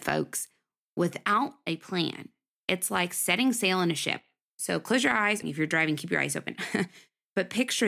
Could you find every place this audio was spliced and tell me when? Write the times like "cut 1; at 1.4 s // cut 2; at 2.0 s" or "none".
cut 1; at 5.4 s